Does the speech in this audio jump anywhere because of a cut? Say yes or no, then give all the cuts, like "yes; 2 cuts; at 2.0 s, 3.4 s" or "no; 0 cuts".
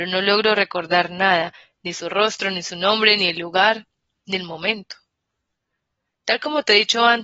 no; 0 cuts